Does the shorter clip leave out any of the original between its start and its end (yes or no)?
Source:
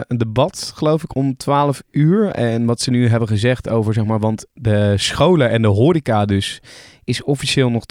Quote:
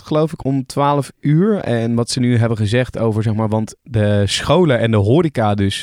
no